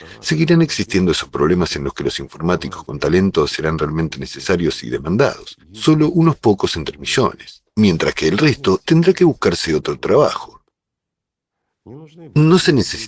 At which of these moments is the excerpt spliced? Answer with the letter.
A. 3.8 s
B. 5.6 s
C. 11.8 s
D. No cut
D